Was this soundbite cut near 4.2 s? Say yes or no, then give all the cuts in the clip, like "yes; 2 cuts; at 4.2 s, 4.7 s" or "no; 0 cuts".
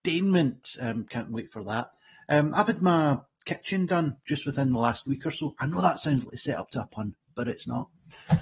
no; 0 cuts